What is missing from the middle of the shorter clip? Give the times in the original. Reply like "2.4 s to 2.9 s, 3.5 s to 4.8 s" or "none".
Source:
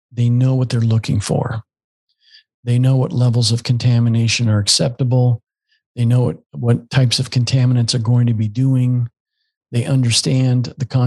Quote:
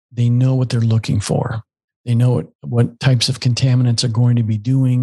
1.9 s to 5.8 s